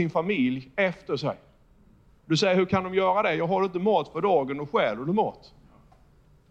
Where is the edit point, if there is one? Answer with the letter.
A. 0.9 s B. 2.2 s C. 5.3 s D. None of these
B